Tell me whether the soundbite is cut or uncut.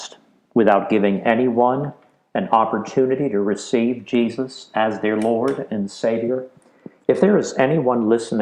uncut